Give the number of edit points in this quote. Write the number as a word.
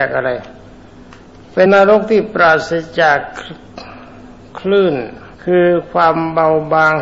two